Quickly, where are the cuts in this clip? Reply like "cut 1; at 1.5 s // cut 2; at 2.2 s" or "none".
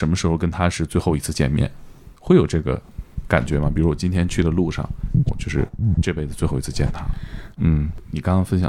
cut 1; at 5.3 s // cut 2; at 7.6 s